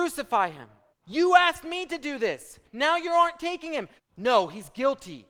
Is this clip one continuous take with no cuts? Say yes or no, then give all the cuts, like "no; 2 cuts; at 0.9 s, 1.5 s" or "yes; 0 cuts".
no; 3 cuts; at 0.9 s, 2.6 s, 4.0 s